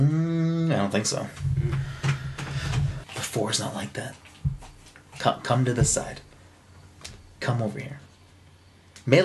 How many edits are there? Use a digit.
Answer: 1